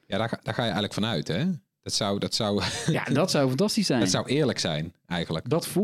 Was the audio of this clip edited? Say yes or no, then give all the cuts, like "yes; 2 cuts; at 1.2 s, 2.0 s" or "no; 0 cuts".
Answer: no; 0 cuts